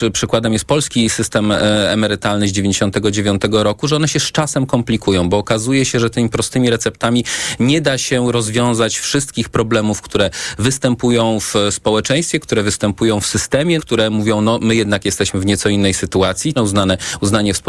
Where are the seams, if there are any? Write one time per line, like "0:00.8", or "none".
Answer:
0:13.8
0:16.6

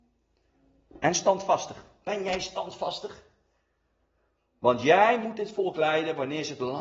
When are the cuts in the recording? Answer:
none

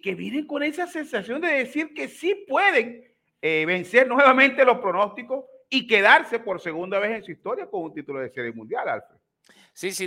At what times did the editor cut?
none

